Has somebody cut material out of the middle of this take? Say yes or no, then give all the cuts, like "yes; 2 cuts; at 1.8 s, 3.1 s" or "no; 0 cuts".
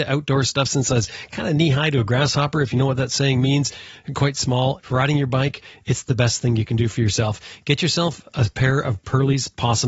yes; 1 cut; at 4.8 s